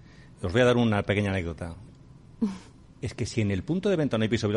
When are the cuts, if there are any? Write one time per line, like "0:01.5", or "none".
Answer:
0:01.9